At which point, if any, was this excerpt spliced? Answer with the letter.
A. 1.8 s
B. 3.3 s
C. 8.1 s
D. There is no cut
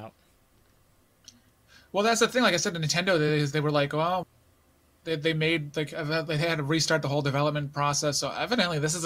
D